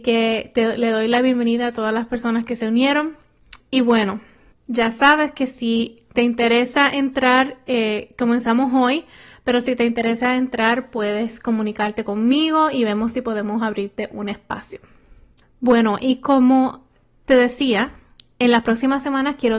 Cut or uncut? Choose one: uncut